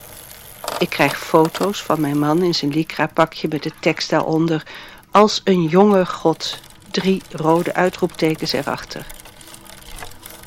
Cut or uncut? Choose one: uncut